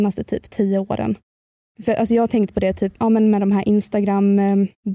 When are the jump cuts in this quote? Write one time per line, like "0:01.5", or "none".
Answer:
0:03.0

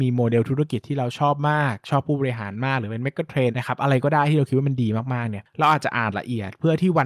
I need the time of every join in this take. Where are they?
0:03.5

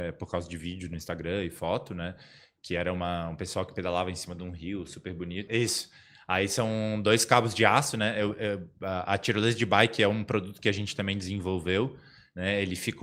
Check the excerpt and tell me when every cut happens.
0:05.5

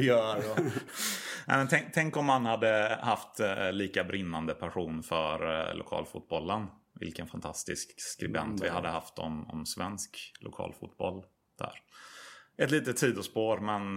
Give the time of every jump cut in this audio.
none

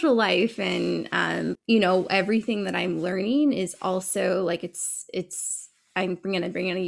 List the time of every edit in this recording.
0:01.6

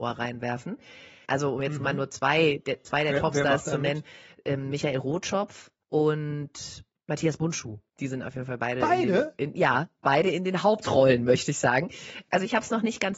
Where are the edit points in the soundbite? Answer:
0:01.2

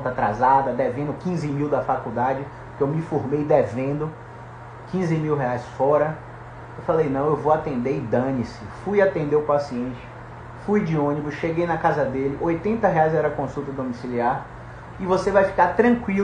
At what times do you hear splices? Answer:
0:06.7
0:14.9

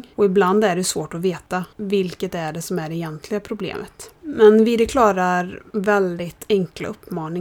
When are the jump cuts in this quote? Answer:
none

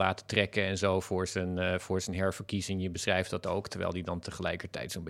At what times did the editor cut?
none

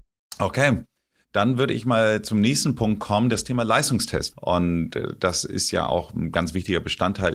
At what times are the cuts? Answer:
0:04.3

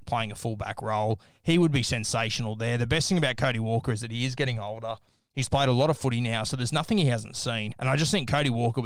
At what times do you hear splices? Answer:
0:07.7

